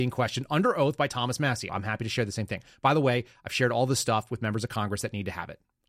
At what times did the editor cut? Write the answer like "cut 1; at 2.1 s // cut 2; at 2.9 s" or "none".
cut 1; at 1.7 s